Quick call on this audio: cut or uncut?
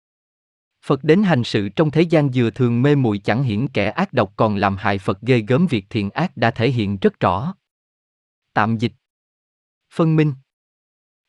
uncut